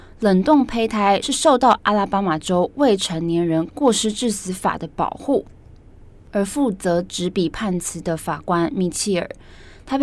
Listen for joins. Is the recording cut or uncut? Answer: uncut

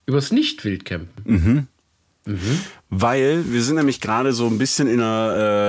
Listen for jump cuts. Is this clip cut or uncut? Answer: uncut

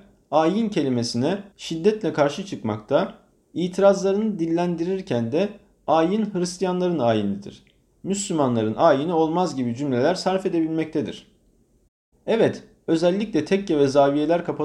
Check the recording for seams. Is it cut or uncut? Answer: cut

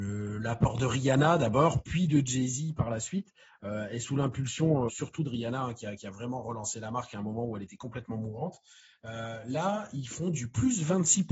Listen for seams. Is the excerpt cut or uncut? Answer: cut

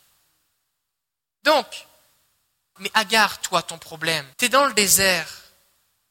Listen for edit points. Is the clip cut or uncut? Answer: cut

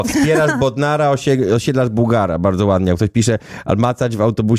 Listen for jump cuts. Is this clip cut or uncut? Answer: uncut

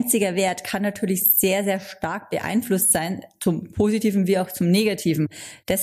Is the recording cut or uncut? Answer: uncut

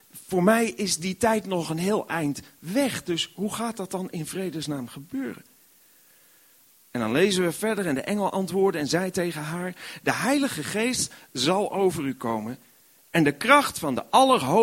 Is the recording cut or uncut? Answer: uncut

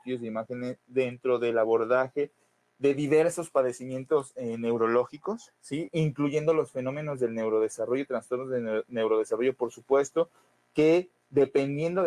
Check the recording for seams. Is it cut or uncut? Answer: uncut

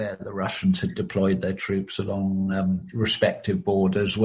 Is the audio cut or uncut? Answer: uncut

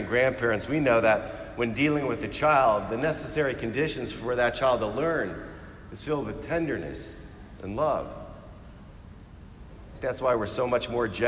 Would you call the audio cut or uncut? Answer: cut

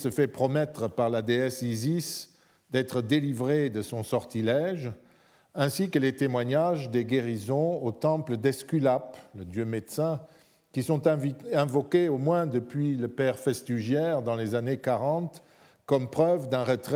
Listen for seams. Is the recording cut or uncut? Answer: uncut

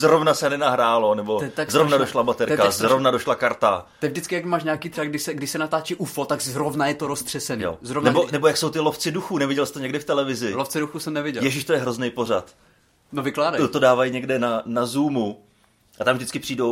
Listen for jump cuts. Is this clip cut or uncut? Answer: uncut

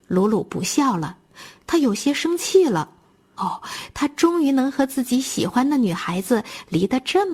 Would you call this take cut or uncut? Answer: cut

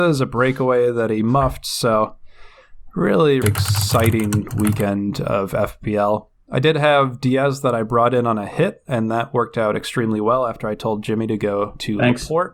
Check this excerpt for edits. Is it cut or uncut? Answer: cut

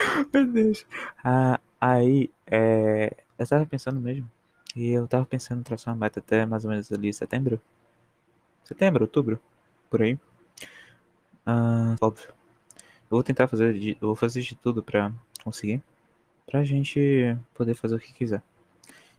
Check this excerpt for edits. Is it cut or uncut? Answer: cut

